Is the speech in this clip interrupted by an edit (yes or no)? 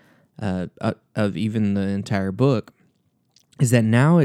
no